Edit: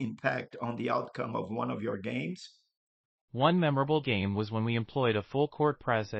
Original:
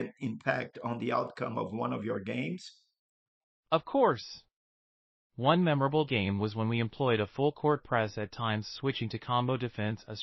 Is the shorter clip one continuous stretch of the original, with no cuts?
no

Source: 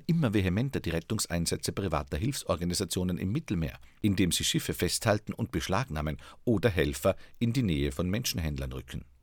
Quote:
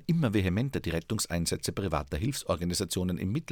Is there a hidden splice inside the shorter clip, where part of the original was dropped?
no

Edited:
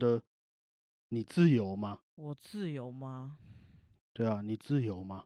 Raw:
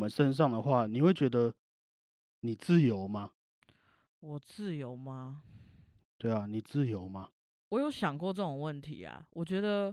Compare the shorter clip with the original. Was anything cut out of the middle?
yes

